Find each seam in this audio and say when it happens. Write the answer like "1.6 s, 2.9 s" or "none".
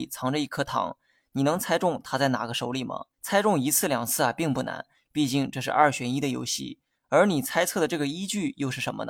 3.1 s, 6.9 s

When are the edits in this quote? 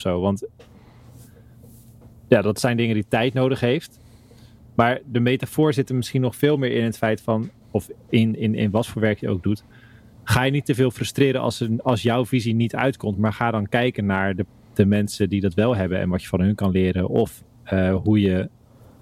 7.6 s

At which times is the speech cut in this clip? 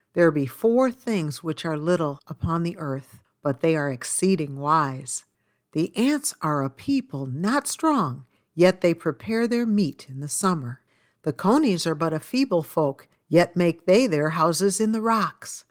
none

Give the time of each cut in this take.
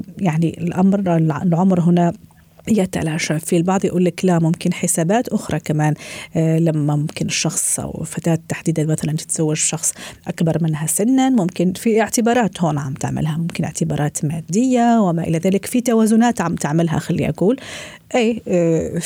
none

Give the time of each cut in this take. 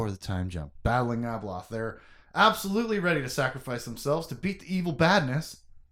none

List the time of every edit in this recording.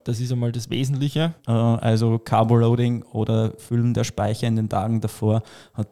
1.4 s

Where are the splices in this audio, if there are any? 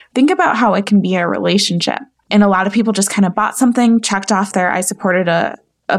2.2 s

